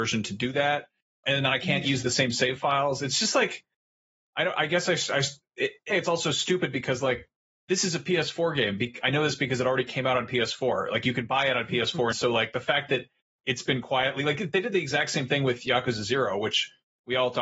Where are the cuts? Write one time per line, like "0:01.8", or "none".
0:01.2
0:05.9
0:12.1